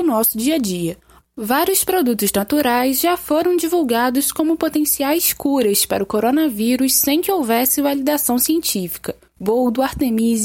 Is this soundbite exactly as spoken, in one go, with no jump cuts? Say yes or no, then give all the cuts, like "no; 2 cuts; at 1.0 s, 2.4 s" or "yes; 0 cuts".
no; 1 cut; at 1.2 s